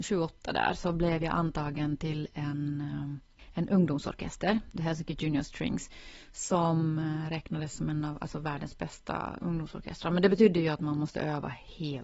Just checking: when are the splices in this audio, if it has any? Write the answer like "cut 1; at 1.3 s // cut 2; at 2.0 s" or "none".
none

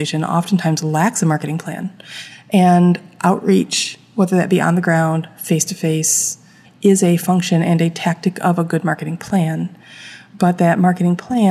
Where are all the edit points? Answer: cut 1; at 2.3 s // cut 2; at 6.6 s

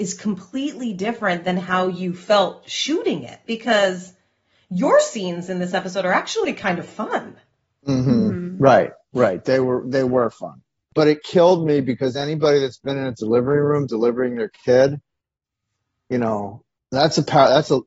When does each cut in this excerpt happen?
cut 1; at 10.9 s

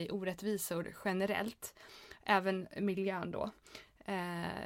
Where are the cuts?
none

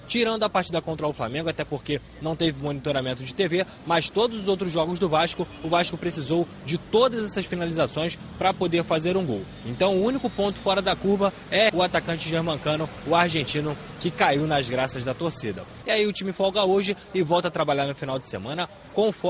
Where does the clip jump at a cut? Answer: cut 1; at 11.7 s // cut 2; at 15.8 s

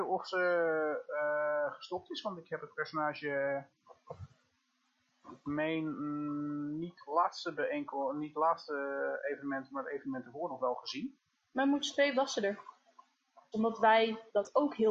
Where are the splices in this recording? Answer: cut 1; at 13.5 s

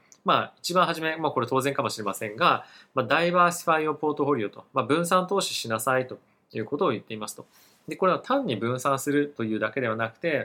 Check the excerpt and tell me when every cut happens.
none

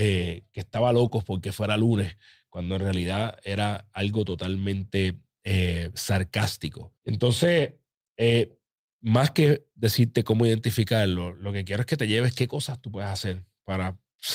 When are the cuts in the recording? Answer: cut 1; at 7.0 s

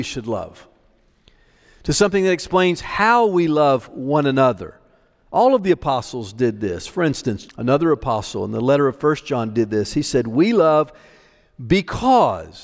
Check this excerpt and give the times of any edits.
cut 1; at 7.5 s

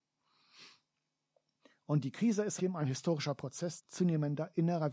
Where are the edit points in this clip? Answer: cut 1; at 2.6 s // cut 2; at 3.8 s

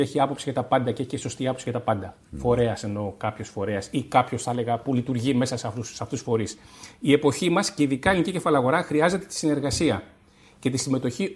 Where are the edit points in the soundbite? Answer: none

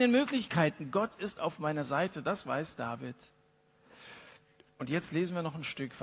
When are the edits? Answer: none

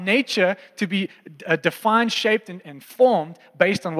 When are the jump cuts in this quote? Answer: cut 1; at 2.6 s

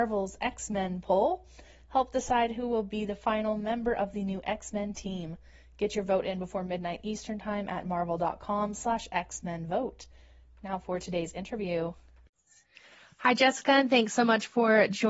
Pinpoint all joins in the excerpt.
none

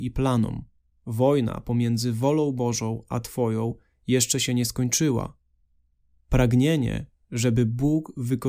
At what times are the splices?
cut 1; at 1.0 s

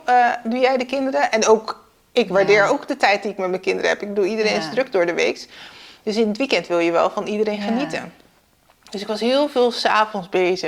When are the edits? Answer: none

